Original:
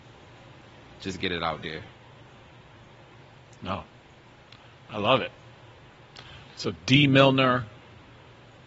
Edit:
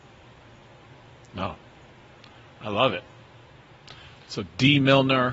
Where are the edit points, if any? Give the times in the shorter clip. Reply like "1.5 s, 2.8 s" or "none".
none